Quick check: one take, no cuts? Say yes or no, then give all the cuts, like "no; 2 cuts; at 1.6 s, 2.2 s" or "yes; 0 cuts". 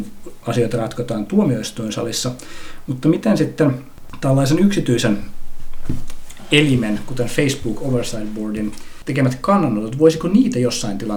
yes; 0 cuts